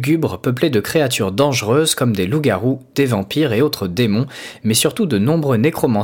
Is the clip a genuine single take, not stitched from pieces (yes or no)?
yes